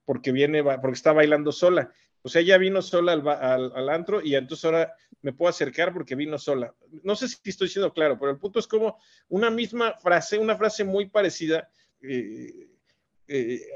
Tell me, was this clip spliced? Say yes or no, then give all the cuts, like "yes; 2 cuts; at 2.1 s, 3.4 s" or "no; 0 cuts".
yes; 2 cuts; at 2.0 s, 11.9 s